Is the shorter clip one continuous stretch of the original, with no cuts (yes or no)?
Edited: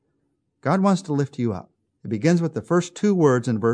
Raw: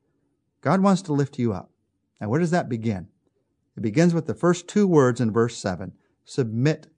no